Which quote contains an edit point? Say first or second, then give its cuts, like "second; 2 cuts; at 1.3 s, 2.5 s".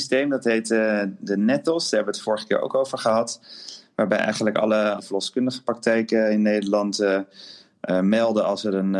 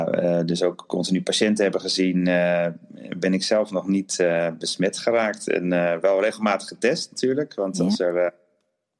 first; 1 cut; at 5.0 s